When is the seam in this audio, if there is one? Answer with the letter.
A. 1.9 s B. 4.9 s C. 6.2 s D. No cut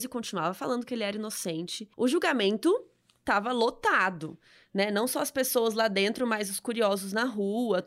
A